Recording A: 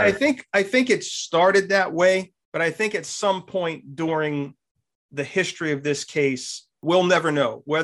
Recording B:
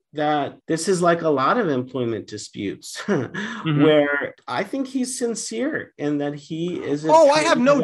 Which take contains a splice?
A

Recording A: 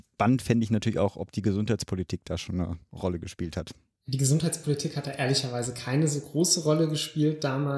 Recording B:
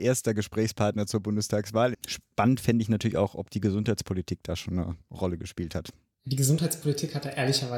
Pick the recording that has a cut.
B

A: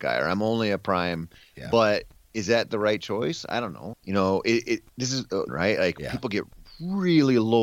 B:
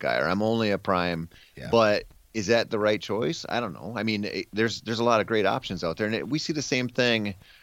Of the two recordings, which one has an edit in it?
A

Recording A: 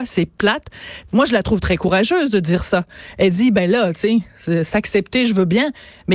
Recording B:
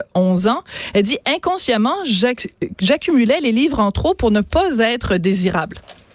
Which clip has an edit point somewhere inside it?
A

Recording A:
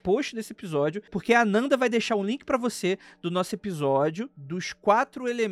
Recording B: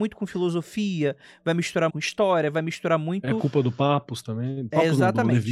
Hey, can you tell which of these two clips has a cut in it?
B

